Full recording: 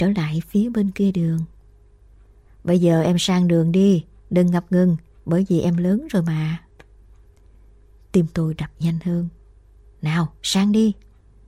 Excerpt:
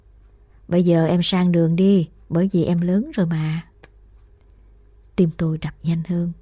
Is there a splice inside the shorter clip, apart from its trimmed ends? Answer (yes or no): yes